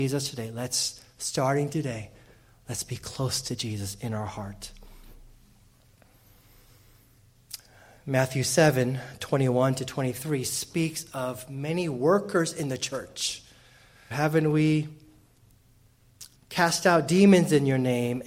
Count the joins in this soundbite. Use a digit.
2